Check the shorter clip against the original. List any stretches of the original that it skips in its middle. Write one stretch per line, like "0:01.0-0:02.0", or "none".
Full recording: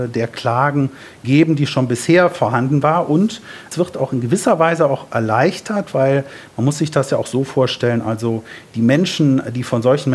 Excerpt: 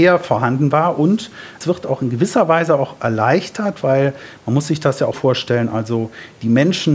0:07.2-0:07.5